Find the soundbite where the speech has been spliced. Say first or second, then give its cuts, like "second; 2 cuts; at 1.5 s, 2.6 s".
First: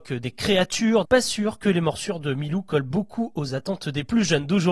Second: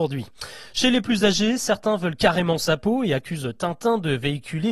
first; 1 cut; at 1.0 s